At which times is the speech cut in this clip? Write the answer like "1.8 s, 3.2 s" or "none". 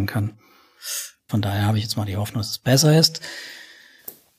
1.3 s

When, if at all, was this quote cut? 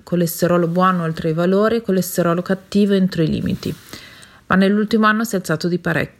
none

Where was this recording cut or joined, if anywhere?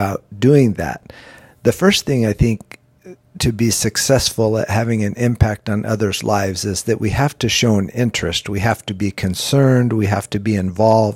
none

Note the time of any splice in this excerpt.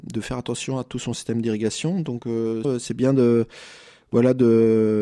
2.6 s

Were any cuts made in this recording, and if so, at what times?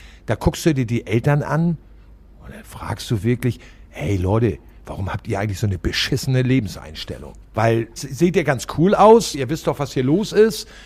8.0 s, 9.3 s

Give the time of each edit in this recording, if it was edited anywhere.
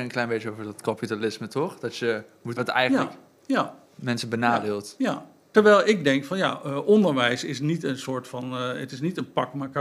2.6 s

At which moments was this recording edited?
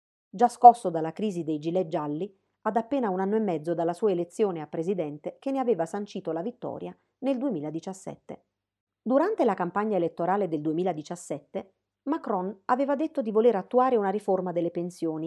8.8 s

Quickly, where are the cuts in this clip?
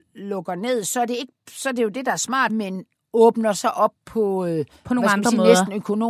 2.5 s

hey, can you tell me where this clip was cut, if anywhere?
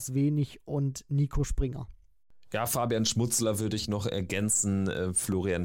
none

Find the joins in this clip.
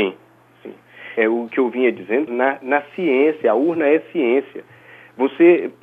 1.2 s, 2.3 s

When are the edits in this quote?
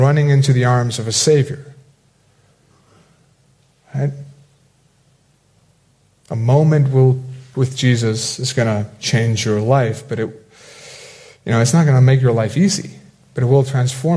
none

